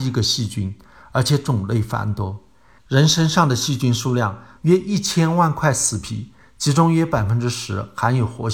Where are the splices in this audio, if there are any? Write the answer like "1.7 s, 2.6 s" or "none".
2.8 s, 4.6 s